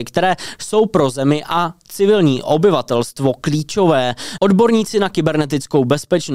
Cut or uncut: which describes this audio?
cut